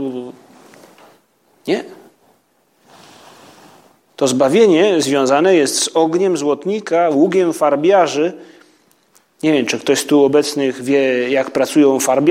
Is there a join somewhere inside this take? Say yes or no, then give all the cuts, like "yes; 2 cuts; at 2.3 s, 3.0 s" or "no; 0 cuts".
no; 0 cuts